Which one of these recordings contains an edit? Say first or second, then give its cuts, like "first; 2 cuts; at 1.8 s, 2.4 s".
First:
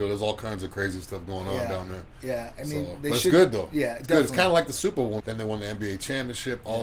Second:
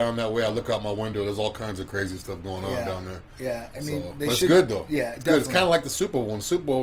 first; 1 cut; at 5.2 s